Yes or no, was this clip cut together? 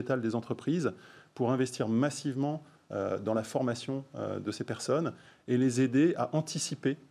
no